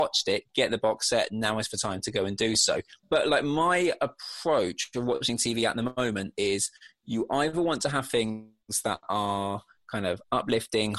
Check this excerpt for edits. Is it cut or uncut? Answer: cut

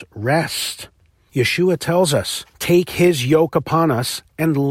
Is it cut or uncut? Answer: cut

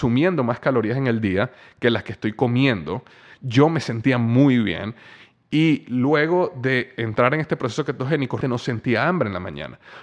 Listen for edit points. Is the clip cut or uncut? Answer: cut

